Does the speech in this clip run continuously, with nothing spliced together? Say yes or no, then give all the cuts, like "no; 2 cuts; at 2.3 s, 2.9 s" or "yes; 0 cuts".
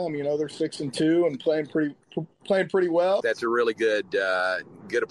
no; 1 cut; at 3.2 s